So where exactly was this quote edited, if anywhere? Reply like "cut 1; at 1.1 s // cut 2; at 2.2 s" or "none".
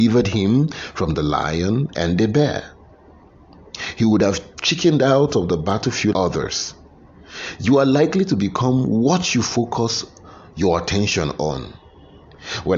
cut 1; at 6.1 s